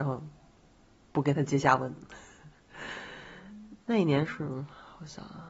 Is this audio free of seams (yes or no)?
no